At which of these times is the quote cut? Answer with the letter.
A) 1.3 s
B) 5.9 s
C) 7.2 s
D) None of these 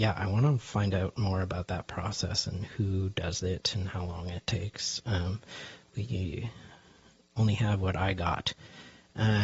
B